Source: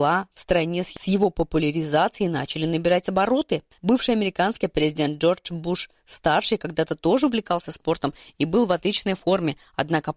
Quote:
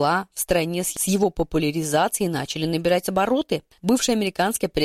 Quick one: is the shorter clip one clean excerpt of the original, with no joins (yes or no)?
yes